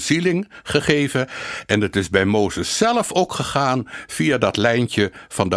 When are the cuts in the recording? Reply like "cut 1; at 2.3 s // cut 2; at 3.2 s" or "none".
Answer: none